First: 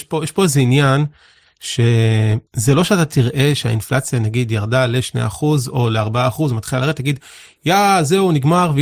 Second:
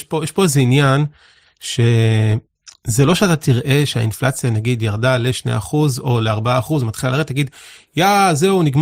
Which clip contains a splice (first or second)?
first